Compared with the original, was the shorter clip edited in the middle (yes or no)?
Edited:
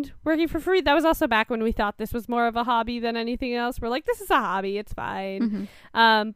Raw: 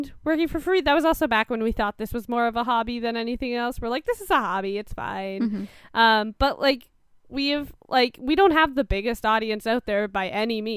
no